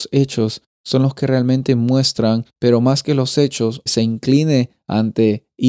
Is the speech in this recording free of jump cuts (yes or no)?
no